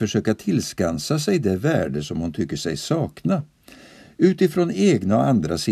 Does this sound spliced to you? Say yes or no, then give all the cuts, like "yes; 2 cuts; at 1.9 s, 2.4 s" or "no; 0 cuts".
no; 0 cuts